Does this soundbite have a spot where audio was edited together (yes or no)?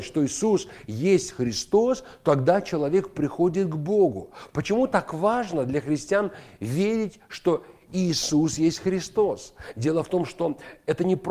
no